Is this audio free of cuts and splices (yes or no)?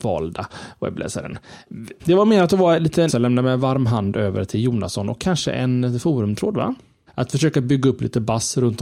no